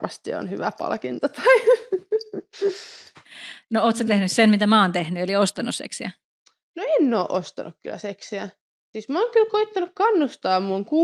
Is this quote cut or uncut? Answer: uncut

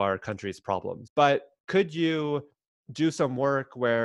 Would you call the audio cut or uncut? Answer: cut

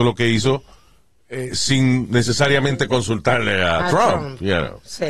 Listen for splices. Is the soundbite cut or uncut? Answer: uncut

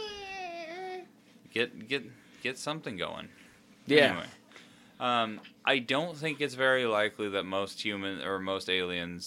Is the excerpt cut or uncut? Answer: uncut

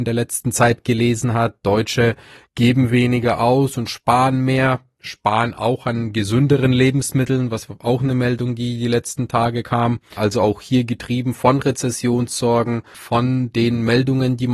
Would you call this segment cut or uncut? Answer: cut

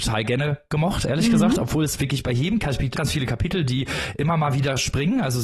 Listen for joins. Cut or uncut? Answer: cut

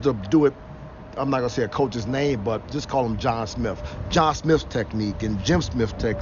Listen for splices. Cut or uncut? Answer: uncut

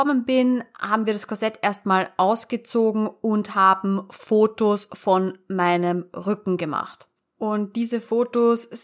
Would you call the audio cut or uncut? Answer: uncut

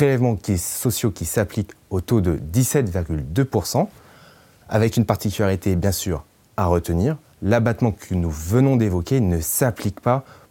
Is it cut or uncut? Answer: cut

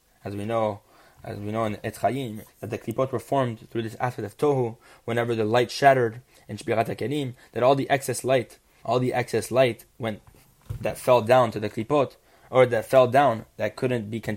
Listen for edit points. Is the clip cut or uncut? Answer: cut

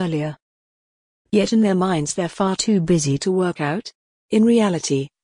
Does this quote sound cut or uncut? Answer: cut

